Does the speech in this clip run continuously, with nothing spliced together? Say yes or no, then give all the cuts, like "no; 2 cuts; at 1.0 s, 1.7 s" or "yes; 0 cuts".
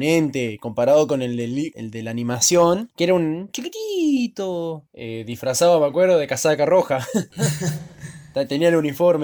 yes; 0 cuts